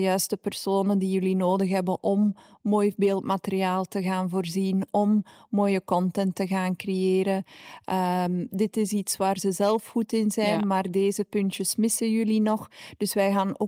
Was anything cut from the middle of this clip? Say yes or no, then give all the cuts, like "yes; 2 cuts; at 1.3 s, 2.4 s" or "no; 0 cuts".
no; 0 cuts